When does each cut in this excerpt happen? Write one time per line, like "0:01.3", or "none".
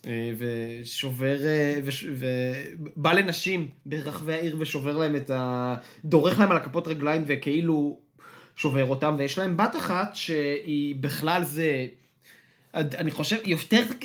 none